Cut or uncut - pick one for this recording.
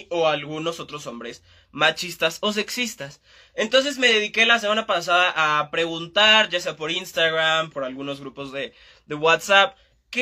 cut